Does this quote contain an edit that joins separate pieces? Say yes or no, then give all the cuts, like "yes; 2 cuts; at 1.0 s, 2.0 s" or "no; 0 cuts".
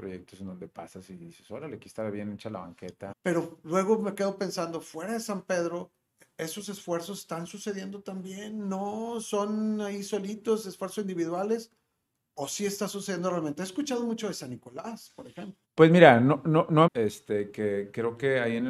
yes; 3 cuts; at 3.1 s, 15.6 s, 16.9 s